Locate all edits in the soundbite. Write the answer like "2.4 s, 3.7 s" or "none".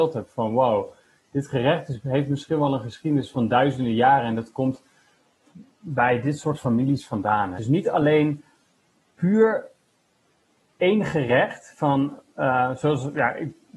7.6 s